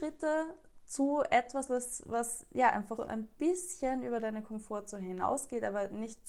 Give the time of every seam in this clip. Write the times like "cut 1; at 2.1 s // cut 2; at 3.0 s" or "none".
cut 1; at 1.7 s // cut 2; at 3.0 s